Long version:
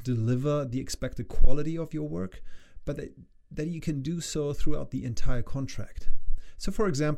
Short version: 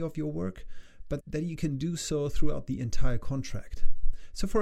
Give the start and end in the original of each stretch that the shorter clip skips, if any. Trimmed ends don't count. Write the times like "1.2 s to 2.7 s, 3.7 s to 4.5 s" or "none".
3.0 s to 3.4 s